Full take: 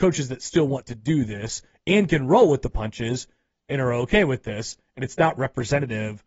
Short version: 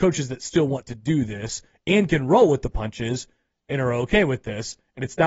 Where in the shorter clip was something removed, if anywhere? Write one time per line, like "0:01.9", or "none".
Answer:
none

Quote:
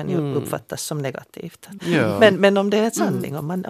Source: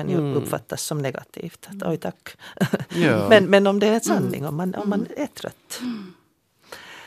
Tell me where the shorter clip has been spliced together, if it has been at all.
0:01.8

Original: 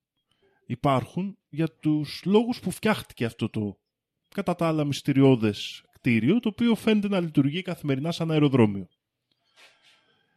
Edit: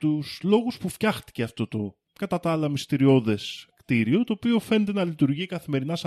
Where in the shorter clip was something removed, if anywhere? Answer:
0:02.0

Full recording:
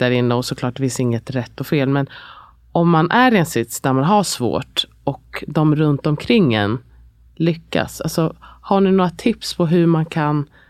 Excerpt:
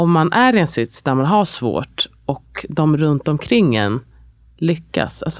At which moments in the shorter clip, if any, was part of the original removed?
none

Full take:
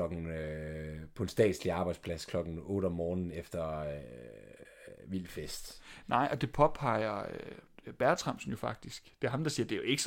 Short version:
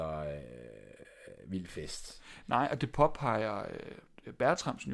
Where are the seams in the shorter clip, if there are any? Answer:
none

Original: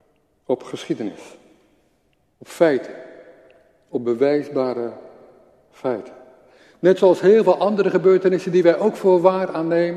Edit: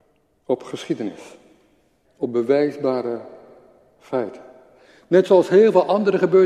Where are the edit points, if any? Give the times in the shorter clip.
0:02.0

